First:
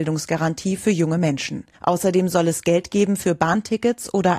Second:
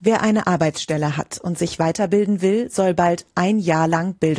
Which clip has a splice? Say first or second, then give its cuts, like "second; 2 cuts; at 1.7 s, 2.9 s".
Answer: first; 1 cut; at 1.7 s